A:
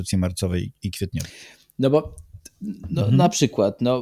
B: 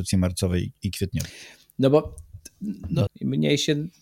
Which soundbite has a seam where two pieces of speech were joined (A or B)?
B